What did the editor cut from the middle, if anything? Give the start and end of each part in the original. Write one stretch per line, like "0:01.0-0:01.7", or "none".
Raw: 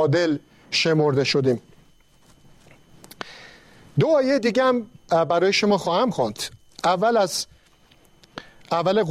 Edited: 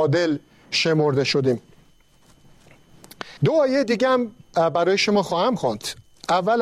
0:03.4-0:03.9